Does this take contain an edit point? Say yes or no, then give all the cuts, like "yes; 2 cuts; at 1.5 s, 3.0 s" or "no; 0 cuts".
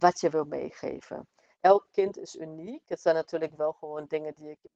yes; 1 cut; at 1.5 s